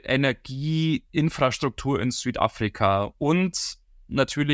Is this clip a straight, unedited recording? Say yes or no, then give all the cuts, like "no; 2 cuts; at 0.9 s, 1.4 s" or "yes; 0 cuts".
yes; 0 cuts